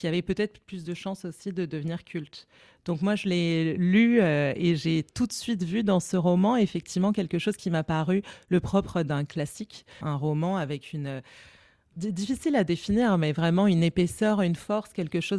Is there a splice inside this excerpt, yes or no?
yes